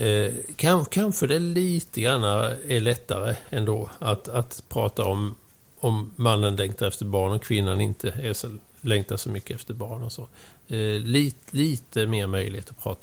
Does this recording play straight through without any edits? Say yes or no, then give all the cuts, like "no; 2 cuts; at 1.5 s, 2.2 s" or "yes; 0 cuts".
yes; 0 cuts